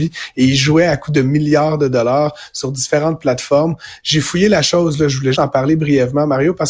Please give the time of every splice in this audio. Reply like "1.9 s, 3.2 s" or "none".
5.3 s